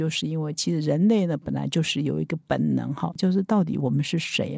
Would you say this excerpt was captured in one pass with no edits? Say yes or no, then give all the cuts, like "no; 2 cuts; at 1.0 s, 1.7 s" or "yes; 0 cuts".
no; 1 cut; at 3.2 s